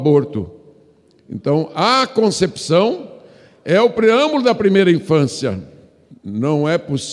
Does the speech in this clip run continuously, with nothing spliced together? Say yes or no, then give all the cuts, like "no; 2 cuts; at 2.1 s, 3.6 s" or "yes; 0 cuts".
no; 1 cut; at 6.1 s